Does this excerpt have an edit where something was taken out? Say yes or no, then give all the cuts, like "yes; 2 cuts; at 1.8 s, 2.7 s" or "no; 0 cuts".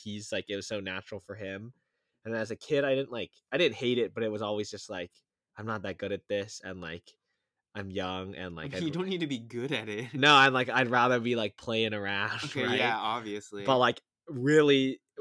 no; 0 cuts